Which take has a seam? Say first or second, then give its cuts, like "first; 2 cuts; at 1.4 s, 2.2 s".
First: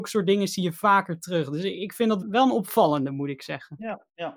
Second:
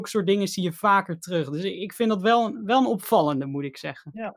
first; 1 cut; at 2.2 s